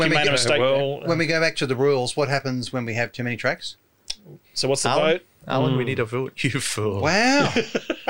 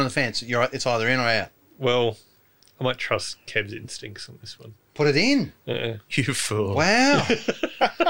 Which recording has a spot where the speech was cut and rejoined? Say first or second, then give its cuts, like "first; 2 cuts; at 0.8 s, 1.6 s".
first; 2 cuts; at 4.4 s, 6.3 s